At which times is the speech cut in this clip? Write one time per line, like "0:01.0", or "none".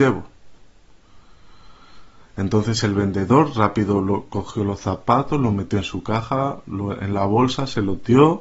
none